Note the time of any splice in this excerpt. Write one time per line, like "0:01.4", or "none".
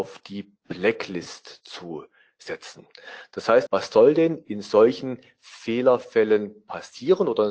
0:03.7